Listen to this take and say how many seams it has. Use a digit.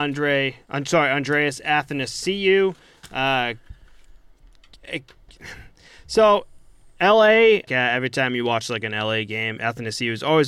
1